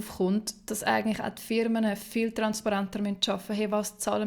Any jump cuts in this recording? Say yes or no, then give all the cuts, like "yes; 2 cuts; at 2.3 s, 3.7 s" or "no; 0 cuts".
no; 0 cuts